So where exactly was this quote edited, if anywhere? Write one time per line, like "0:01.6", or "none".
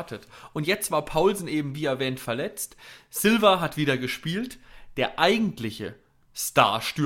none